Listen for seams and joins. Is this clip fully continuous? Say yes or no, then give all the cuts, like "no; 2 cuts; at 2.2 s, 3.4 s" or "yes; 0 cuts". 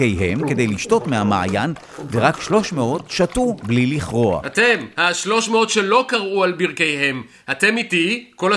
yes; 0 cuts